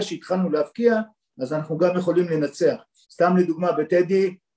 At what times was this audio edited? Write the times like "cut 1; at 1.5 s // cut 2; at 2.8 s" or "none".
cut 1; at 3.0 s